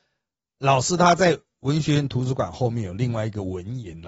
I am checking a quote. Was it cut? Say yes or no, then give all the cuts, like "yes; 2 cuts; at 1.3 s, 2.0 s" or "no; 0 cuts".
no; 0 cuts